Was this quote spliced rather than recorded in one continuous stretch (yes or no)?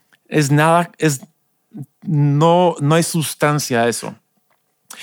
no